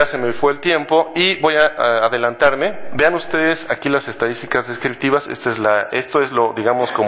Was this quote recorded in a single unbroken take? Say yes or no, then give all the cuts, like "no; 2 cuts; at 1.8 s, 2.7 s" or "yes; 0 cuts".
yes; 0 cuts